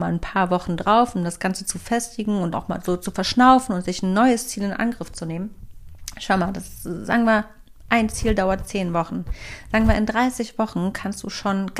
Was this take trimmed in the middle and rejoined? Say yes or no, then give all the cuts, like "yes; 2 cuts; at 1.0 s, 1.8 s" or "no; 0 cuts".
yes; 1 cut; at 2.5 s